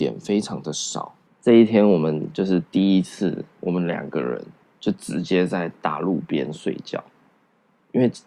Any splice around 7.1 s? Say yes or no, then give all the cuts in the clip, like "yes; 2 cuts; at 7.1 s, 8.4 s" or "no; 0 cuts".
no; 1 cut; at 1.3 s